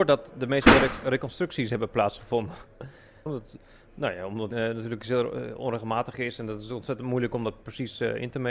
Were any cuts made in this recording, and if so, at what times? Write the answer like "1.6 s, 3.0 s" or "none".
3.3 s, 4.5 s